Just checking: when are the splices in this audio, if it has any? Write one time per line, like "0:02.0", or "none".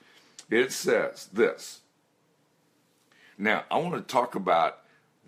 0:03.3